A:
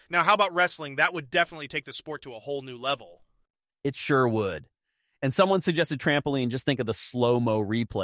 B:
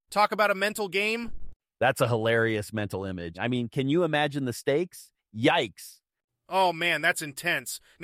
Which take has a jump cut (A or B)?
B